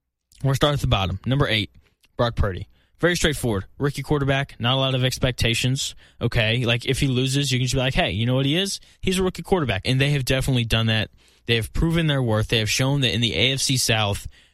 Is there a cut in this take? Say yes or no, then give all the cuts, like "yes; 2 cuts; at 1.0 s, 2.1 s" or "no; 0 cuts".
yes; 1 cut; at 9.8 s